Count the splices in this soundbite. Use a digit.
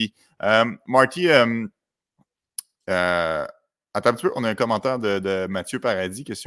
0